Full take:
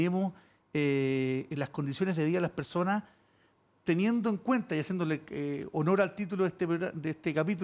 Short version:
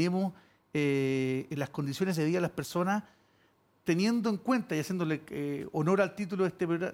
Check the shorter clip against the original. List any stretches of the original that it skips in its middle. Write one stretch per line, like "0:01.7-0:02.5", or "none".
none